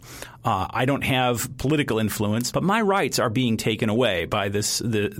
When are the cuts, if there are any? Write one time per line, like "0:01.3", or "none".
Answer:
0:02.5